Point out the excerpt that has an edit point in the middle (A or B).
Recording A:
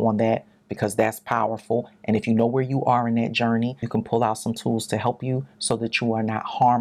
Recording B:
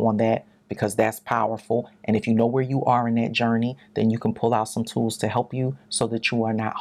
A